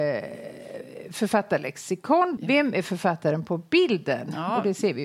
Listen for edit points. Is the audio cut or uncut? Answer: cut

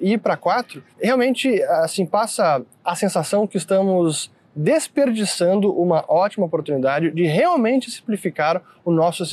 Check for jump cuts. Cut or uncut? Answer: cut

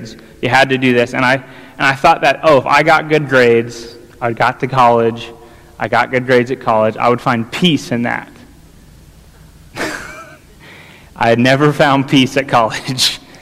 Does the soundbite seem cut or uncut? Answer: uncut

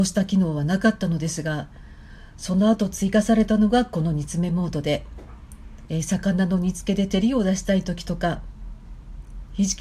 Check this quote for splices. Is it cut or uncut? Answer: cut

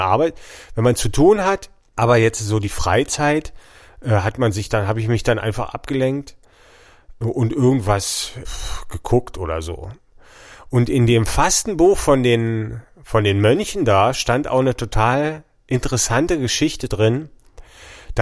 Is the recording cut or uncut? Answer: uncut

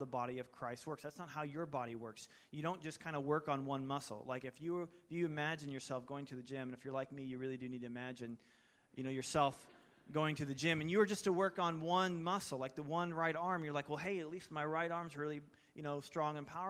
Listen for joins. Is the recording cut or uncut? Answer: uncut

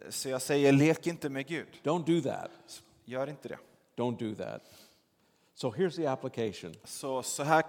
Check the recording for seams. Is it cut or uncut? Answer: uncut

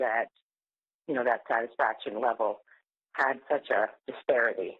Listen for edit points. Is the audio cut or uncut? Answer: cut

